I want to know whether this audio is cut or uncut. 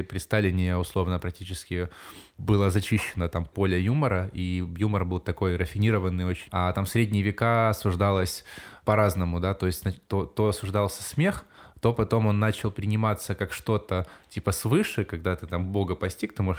uncut